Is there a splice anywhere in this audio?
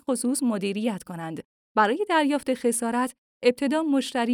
yes; 1 cut; at 1.6 s

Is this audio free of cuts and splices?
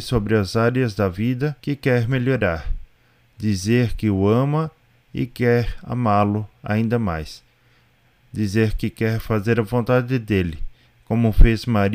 no; 1 cut; at 1.6 s

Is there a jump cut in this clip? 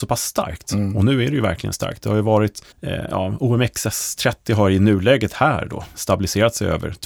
yes; 2 cuts; at 2.7 s, 5.9 s

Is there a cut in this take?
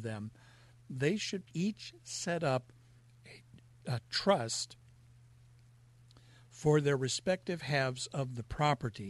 yes; 1 cut; at 1.5 s

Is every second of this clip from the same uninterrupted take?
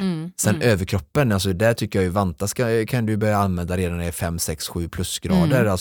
yes; 0 cuts

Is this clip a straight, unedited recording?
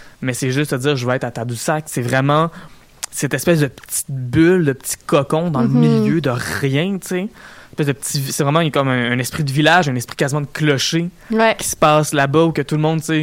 yes; 0 cuts

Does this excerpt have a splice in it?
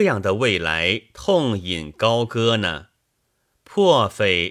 no; 0 cuts

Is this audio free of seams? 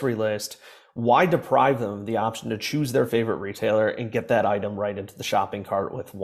yes; 0 cuts

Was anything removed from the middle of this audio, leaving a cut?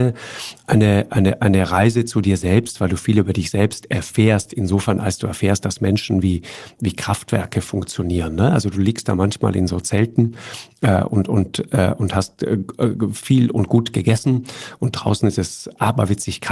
no; 0 cuts

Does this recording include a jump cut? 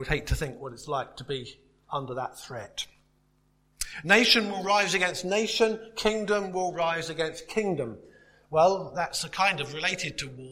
no; 0 cuts

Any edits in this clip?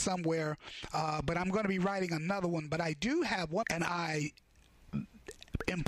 yes; 1 cut; at 3.6 s

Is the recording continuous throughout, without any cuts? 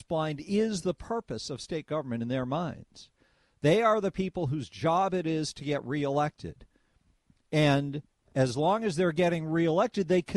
yes; 0 cuts

